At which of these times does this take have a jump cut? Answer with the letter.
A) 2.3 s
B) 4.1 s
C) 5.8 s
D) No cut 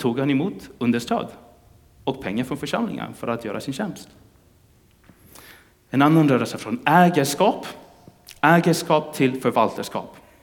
D